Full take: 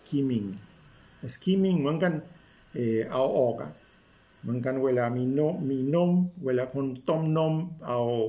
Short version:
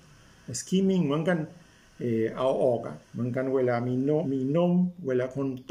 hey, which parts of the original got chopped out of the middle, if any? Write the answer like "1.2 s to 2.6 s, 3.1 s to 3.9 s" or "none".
3.8 s to 4.3 s, 5.5 s to 5.6 s